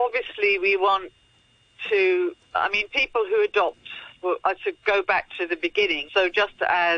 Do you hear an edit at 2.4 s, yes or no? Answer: no